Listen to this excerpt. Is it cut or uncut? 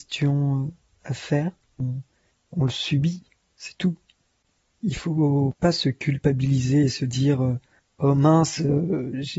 cut